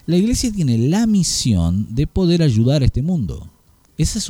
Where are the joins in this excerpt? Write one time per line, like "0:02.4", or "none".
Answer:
none